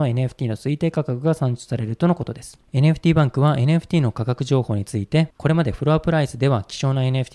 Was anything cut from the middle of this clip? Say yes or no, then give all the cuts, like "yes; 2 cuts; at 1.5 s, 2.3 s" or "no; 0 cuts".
no; 0 cuts